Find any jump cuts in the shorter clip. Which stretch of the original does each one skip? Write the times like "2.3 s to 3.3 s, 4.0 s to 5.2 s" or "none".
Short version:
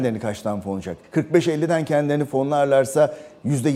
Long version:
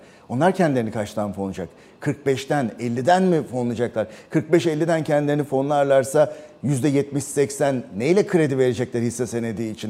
1.8 s to 4.2 s